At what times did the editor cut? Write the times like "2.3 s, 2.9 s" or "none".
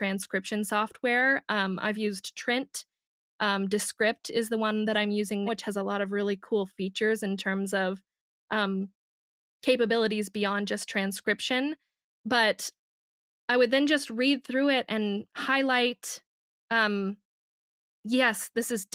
5.5 s